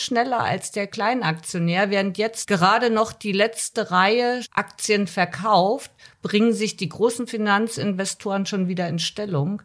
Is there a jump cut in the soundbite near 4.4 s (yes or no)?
yes